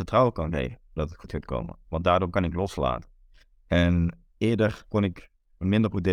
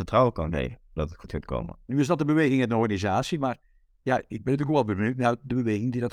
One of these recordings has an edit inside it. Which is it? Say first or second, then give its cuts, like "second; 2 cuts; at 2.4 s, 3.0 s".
second; 1 cut; at 1.8 s